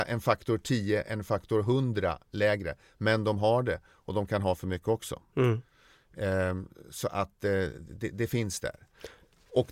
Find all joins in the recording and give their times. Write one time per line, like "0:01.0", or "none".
none